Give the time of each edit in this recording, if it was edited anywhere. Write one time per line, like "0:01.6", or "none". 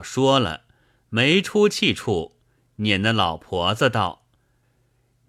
none